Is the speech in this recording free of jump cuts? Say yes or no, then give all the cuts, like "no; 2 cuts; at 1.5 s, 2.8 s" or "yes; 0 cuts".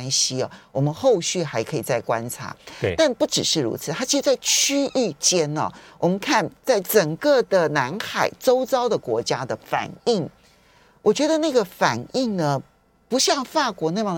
yes; 0 cuts